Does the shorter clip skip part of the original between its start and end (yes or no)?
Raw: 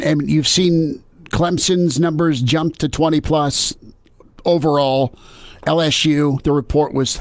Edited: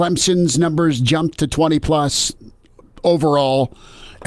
no